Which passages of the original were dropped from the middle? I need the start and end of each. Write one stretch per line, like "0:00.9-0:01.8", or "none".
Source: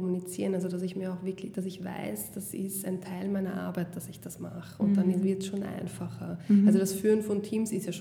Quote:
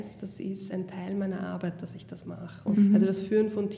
0:04.9-0:06.5